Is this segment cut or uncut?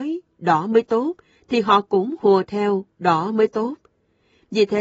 uncut